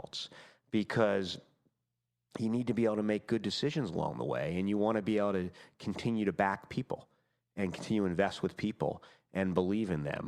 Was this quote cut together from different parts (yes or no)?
no